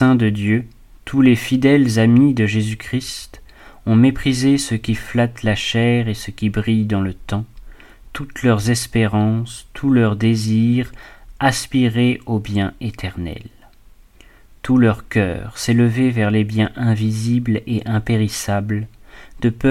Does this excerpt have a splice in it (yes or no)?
no